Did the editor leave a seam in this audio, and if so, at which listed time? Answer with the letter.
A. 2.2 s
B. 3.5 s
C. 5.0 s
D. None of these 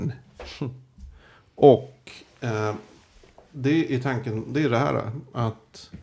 D